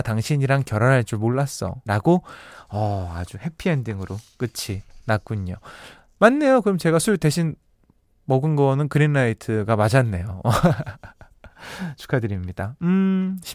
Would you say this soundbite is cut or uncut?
cut